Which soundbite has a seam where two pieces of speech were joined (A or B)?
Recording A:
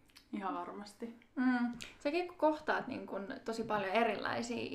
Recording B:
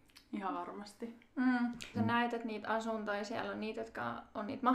B